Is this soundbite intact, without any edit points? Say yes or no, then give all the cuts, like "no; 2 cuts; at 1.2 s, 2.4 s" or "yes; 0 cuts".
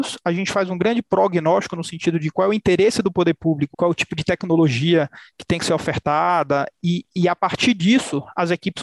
no; 1 cut; at 3.7 s